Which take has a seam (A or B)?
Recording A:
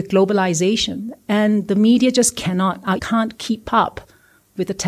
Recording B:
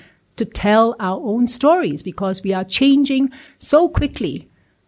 A